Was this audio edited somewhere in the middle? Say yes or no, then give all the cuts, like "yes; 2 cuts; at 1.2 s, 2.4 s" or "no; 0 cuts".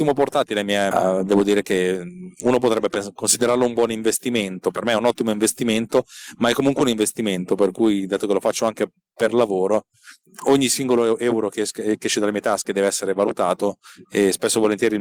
yes; 1 cut; at 0.9 s